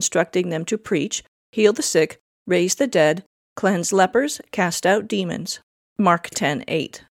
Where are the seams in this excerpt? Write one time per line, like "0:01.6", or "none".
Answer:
none